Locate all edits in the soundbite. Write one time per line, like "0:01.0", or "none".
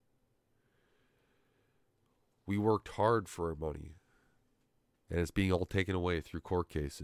none